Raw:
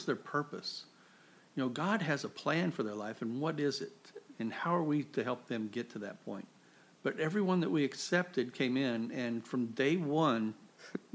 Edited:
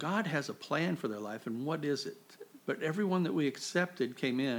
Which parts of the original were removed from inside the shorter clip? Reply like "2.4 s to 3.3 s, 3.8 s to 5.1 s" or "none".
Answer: 4.3 s to 7.0 s